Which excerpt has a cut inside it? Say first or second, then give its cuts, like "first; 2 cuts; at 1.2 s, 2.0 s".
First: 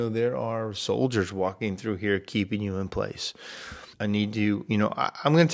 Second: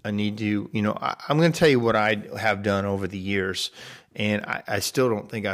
first; 1 cut; at 3.9 s